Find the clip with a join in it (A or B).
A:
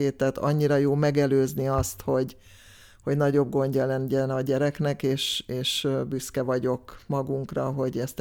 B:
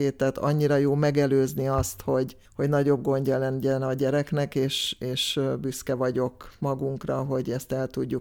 B